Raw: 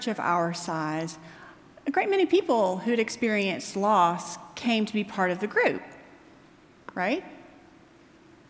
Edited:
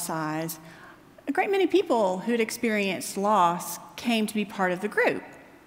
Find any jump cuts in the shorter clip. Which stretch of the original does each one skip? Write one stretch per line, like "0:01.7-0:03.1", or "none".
none